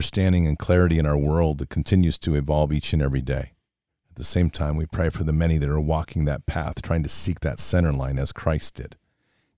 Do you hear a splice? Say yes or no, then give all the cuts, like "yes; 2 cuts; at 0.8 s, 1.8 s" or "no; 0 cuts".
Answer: yes; 1 cut; at 3.9 s